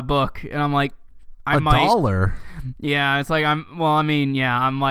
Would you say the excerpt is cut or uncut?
uncut